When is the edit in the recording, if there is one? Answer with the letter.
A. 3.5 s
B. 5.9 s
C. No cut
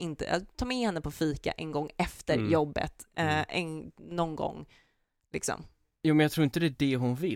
C